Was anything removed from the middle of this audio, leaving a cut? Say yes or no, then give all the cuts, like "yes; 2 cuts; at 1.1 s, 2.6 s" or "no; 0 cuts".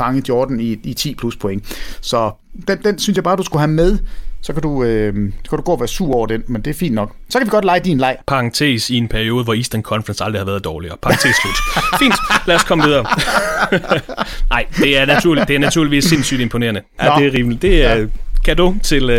yes; 1 cut; at 17.0 s